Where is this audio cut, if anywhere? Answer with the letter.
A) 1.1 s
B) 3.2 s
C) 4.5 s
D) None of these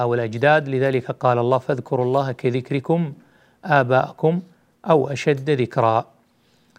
D